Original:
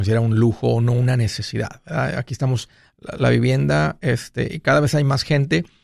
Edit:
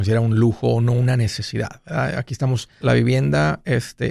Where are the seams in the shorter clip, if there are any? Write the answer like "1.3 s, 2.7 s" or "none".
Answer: 2.8 s